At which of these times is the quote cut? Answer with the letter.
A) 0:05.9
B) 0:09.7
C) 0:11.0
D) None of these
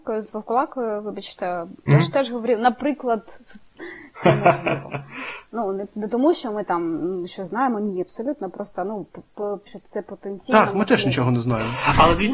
B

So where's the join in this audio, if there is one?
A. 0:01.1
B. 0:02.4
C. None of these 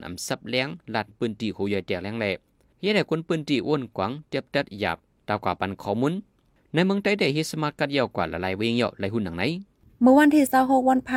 A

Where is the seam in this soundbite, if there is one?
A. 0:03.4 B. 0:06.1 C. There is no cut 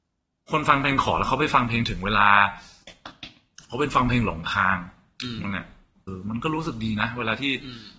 B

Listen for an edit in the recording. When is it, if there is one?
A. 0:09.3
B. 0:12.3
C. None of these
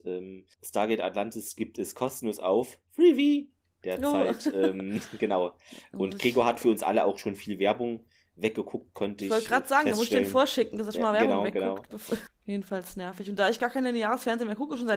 B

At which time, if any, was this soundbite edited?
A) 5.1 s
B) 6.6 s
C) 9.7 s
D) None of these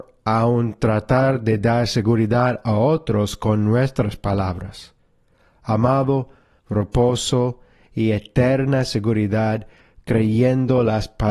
B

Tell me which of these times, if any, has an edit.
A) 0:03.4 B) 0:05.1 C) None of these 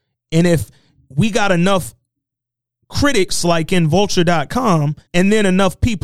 B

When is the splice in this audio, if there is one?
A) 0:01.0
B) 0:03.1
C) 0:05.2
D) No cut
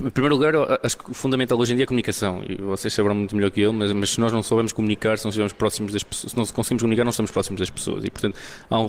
D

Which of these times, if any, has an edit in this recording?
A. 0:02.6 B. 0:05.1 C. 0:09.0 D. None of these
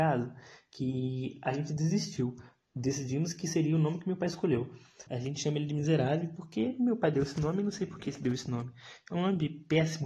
B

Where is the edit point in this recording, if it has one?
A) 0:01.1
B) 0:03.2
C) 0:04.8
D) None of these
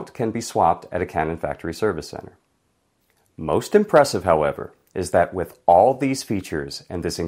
D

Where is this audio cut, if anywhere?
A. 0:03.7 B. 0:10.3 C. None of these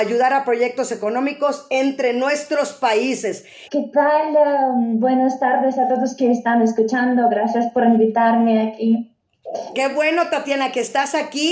A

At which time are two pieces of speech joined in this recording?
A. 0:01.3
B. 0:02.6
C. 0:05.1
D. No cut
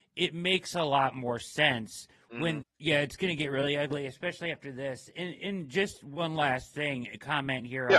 B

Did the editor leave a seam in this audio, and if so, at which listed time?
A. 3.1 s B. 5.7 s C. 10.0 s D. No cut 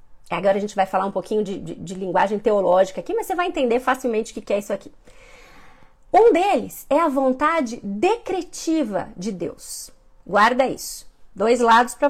D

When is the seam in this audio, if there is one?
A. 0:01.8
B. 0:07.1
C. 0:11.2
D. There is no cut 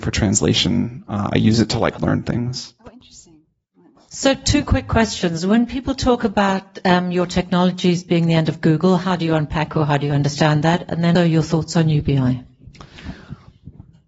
C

